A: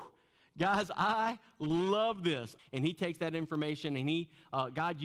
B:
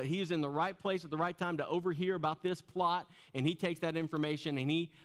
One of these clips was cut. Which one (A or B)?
A